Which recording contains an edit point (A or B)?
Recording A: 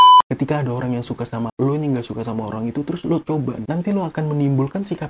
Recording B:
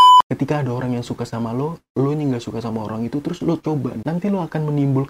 A